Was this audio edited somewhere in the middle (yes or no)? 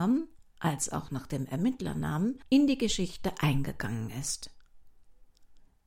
no